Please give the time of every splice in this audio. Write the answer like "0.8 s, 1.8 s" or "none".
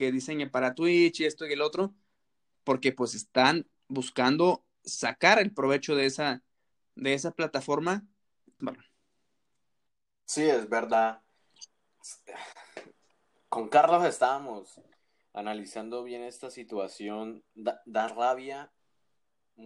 8.6 s